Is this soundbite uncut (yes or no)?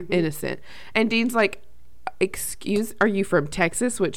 yes